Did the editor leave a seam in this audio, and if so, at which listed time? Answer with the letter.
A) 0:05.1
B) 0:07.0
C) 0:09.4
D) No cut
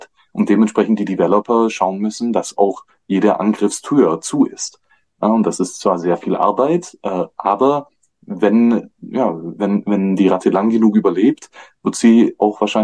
D